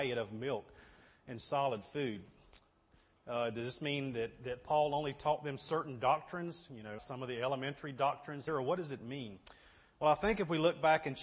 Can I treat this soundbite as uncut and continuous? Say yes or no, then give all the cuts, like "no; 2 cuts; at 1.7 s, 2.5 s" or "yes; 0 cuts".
no; 2 cuts; at 7.0 s, 8.5 s